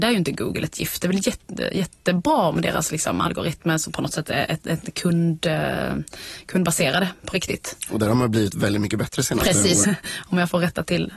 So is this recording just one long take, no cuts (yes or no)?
no